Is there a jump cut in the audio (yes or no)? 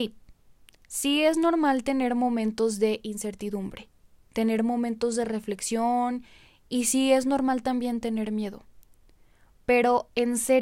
no